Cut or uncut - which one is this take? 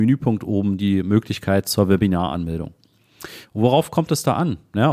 cut